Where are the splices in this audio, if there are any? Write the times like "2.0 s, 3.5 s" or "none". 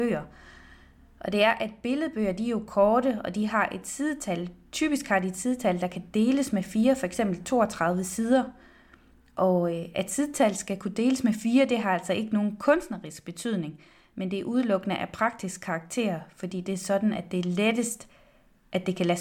none

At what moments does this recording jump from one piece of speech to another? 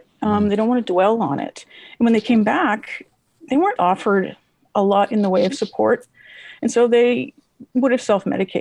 3.8 s

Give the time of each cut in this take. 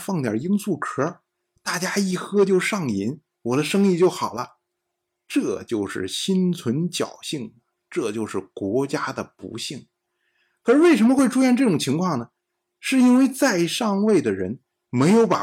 none

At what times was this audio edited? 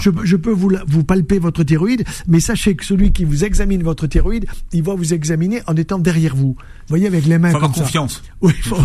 6.9 s

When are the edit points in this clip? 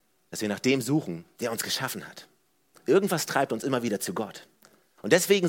none

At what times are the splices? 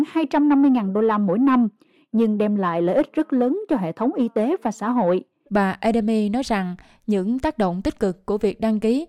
5.5 s

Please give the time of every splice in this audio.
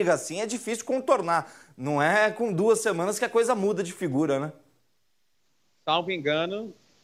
none

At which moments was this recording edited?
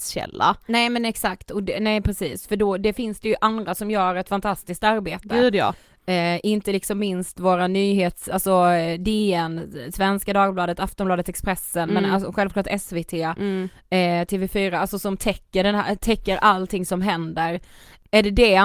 none

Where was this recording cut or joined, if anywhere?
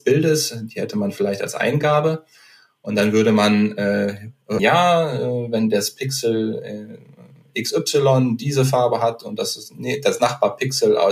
4.6 s

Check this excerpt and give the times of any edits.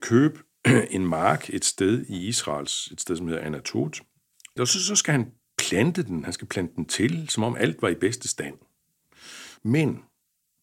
4.6 s, 9.6 s

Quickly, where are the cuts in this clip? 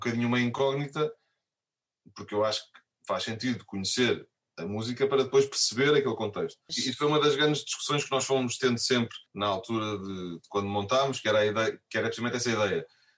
6.7 s, 9.3 s

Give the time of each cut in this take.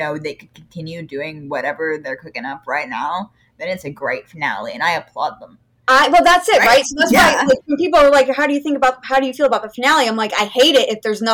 none

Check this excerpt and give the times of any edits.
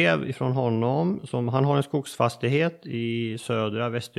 none

